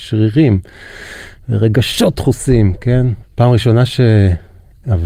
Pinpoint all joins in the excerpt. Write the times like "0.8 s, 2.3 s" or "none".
3.2 s